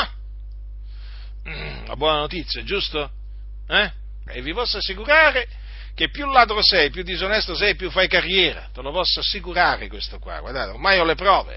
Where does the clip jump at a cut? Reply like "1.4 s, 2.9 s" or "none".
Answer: 4.3 s